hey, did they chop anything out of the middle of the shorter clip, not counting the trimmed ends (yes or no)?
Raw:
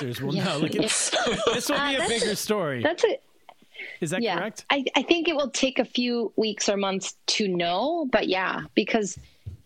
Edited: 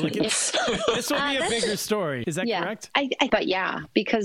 yes